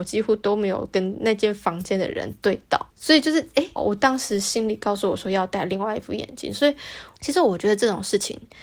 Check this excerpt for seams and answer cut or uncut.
cut